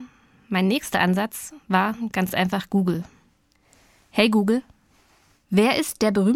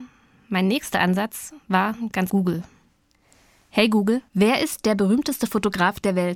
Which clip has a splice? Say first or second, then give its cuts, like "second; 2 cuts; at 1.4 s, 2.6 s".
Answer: second; 2 cuts; at 2.3 s, 4.3 s